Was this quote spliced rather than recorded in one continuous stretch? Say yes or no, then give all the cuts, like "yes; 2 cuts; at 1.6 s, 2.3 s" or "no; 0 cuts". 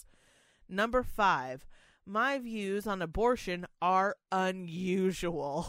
no; 0 cuts